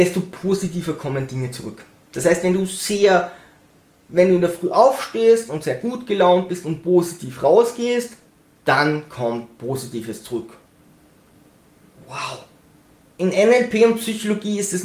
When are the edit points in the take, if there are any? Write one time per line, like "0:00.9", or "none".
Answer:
0:13.0